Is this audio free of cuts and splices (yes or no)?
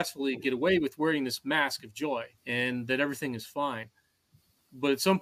no